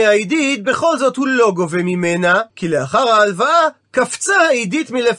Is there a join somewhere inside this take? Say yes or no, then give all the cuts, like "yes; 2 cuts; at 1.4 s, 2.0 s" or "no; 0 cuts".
yes; 1 cut; at 2.5 s